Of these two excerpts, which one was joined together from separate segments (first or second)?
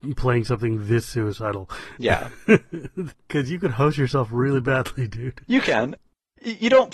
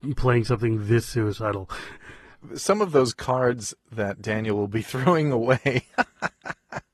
second